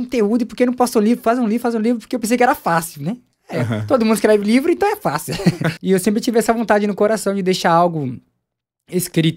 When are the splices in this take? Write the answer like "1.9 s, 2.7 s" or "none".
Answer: 5.8 s